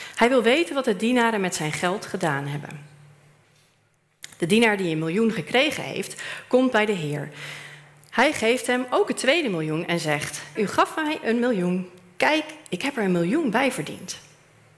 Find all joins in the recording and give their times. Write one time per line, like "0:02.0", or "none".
0:10.6